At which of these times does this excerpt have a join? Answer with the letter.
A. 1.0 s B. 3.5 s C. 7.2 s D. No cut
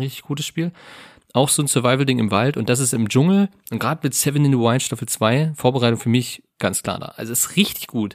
D